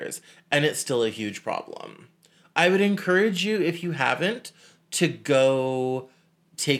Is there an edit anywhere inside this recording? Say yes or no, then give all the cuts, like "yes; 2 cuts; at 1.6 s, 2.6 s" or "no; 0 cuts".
no; 0 cuts